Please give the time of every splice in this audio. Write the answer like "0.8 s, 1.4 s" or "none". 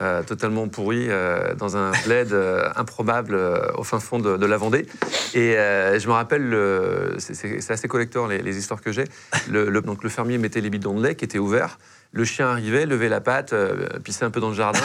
9.8 s